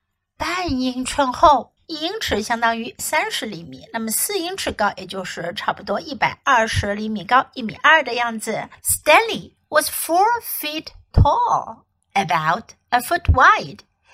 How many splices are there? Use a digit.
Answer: 2